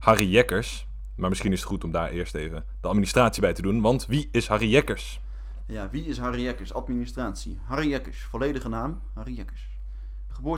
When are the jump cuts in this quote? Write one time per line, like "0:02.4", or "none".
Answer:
none